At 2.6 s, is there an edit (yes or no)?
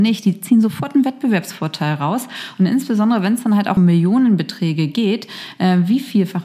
no